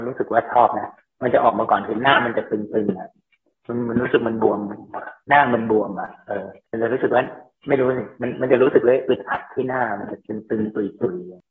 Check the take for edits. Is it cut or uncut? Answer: uncut